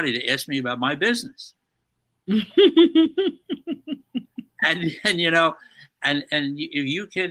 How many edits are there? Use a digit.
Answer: 0